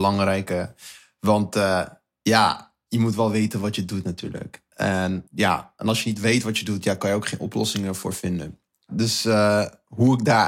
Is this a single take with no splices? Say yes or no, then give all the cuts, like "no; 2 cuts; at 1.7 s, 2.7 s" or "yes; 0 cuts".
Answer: no; 1 cut; at 5.3 s